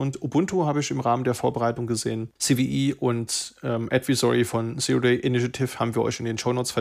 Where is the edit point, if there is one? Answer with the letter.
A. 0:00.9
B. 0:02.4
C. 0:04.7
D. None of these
B